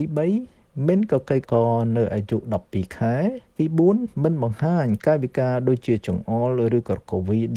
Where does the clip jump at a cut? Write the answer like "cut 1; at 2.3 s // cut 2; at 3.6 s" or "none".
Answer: cut 1; at 1.4 s // cut 2; at 3.5 s